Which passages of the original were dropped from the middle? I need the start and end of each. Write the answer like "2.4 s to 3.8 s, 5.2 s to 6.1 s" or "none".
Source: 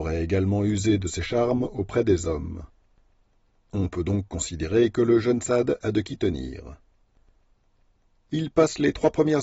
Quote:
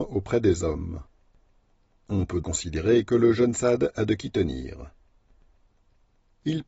4.0 s to 4.3 s